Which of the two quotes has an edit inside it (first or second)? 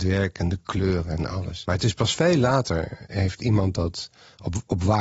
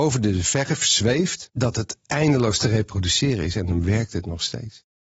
first